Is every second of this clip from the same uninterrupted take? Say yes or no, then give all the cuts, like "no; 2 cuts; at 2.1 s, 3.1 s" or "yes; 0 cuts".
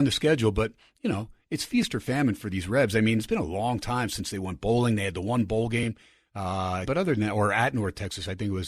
no; 1 cut; at 6.8 s